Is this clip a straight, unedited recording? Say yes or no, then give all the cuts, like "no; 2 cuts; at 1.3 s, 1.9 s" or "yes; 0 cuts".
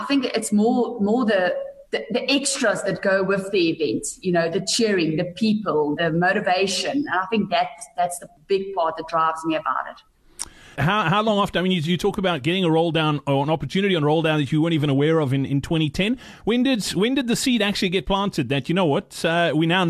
no; 2 cuts; at 6.0 s, 10.8 s